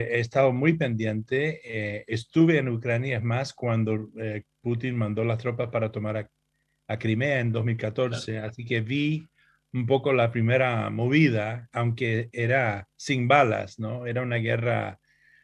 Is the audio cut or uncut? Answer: uncut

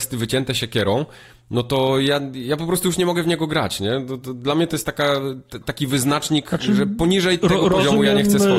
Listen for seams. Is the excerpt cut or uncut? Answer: uncut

